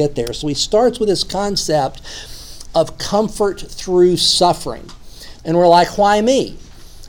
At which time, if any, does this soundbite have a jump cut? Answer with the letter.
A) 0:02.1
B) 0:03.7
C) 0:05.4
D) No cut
C